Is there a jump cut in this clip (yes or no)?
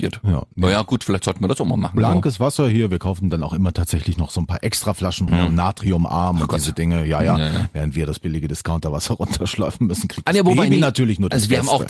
yes